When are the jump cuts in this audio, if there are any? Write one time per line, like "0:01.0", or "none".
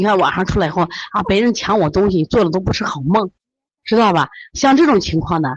none